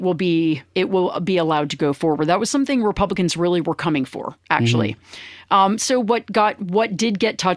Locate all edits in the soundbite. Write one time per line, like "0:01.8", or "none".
none